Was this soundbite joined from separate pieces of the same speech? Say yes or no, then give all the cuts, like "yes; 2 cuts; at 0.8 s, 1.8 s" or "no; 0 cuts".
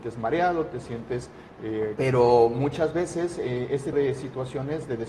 yes; 2 cuts; at 2.0 s, 3.9 s